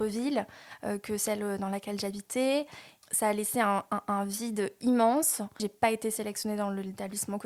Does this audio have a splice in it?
yes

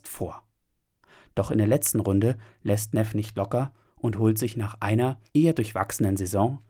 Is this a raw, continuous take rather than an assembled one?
yes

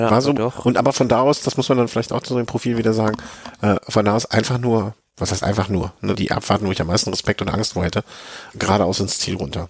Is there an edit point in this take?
yes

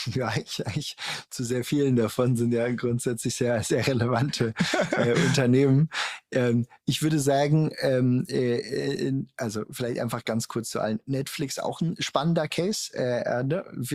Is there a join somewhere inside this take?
no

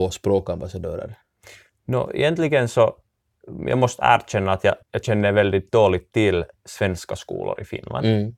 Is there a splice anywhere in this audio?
yes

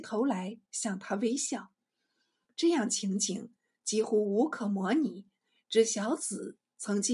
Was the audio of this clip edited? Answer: no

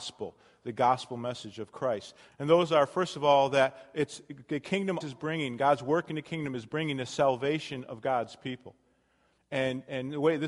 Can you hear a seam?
yes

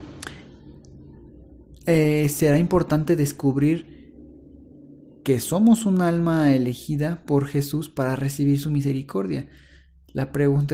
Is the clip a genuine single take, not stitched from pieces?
yes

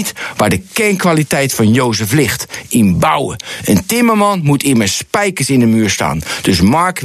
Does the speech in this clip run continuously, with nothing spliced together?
yes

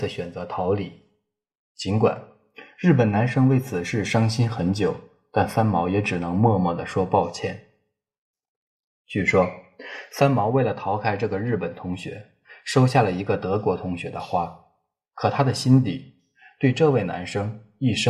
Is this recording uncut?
yes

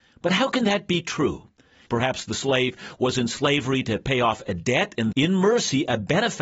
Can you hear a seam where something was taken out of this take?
yes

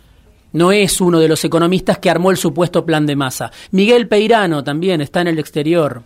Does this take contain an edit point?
no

